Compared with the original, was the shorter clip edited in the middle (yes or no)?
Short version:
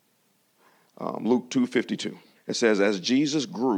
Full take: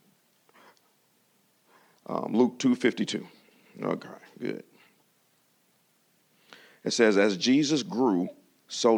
yes